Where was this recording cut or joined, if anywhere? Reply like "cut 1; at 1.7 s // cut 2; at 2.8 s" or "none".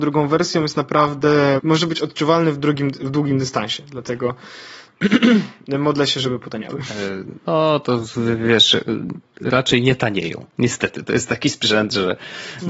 cut 1; at 1.6 s